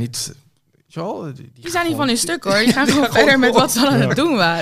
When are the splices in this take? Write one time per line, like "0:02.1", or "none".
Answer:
none